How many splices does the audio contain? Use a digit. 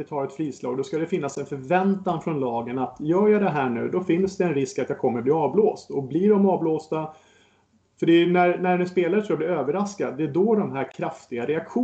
0